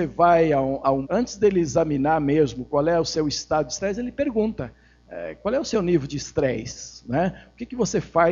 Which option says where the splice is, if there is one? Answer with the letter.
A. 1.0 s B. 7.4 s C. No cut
A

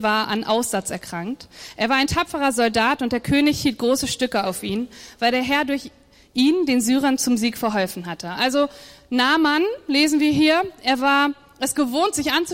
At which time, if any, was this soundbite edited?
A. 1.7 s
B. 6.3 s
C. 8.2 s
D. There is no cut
D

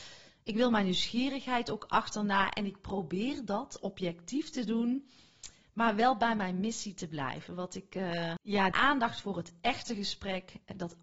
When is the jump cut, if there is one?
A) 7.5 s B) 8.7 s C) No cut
B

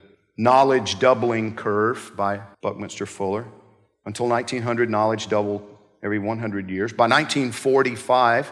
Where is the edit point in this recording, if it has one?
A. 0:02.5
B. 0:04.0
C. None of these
A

